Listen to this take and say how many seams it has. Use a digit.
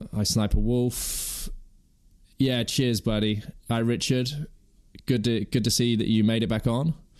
0